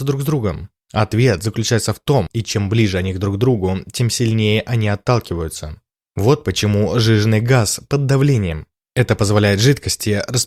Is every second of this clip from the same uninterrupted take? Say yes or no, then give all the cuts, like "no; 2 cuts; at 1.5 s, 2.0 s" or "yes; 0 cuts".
no; 2 cuts; at 2.3 s, 8.9 s